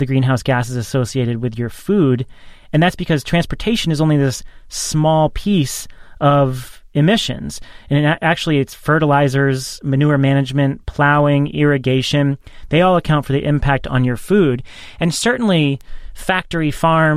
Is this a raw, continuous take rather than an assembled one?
yes; 0 cuts

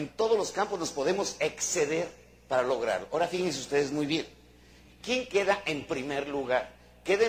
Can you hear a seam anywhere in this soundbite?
no; 0 cuts

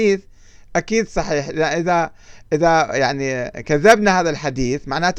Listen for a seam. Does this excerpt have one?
no; 0 cuts

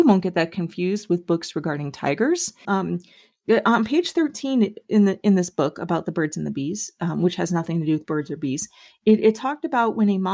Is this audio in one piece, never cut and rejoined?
no; 1 cut; at 2.6 s

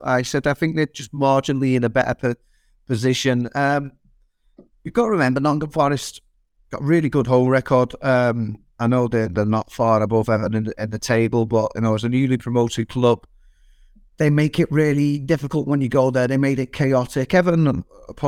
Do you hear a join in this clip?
no; 0 cuts

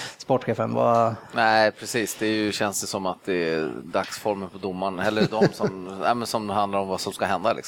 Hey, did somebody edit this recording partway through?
no; 0 cuts

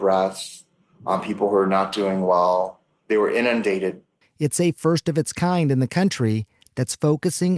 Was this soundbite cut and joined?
yes; 1 cut; at 4.2 s

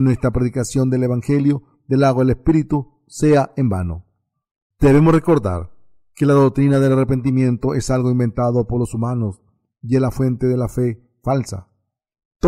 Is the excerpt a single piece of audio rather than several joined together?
yes; 0 cuts

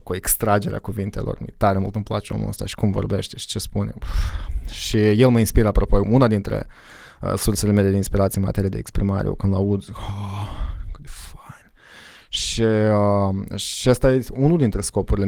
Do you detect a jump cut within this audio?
yes; 1 cut; at 6.0 s

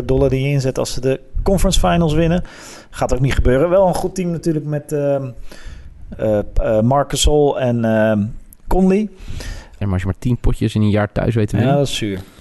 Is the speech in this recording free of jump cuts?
no; 2 cuts; at 6.1 s, 9.8 s

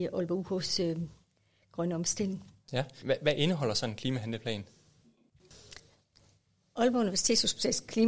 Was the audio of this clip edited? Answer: no; 0 cuts

